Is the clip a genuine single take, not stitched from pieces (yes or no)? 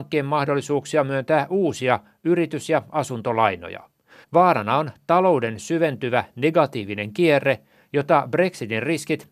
no